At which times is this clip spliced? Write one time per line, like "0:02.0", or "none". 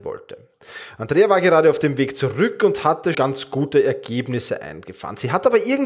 0:03.1